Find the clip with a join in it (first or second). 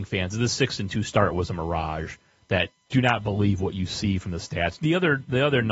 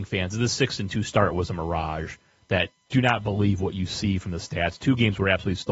first